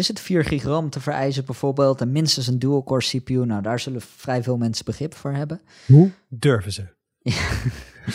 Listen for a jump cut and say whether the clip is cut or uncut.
uncut